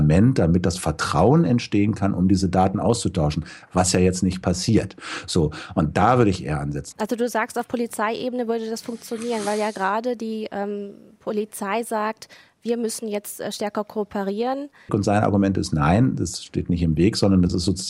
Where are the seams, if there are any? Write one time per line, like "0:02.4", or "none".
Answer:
0:06.9
0:14.9